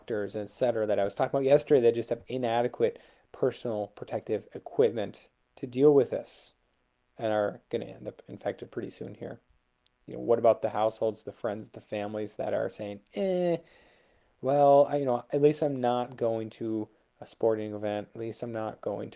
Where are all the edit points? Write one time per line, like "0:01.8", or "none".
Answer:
none